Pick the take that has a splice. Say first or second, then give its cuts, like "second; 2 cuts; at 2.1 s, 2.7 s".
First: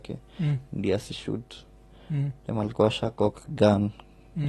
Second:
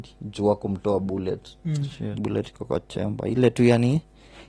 second; 1 cut; at 2.2 s